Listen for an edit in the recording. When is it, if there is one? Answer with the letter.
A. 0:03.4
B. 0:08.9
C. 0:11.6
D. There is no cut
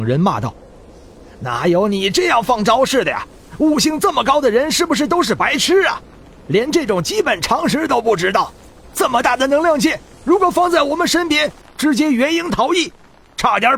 C